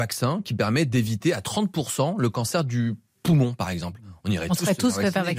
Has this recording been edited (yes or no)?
no